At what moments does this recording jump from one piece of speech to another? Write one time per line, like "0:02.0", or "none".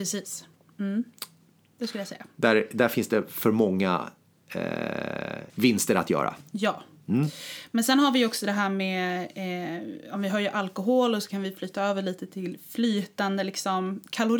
0:05.5